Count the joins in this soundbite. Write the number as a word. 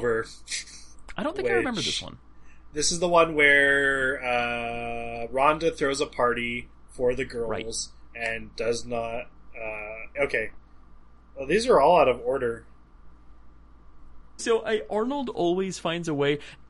two